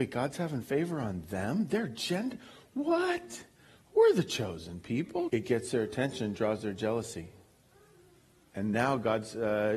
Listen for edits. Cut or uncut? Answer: cut